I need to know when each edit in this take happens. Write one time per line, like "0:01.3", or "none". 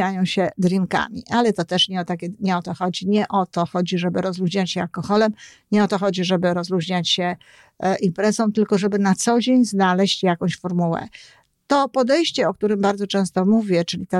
none